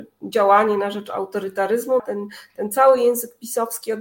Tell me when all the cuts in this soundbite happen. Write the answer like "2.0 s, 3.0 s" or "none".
2.0 s